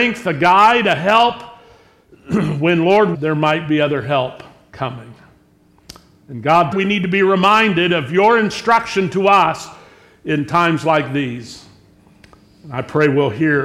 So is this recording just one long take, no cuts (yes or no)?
no